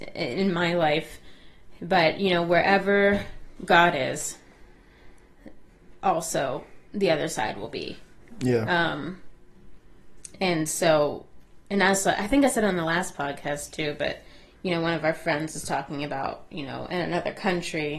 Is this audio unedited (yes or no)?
yes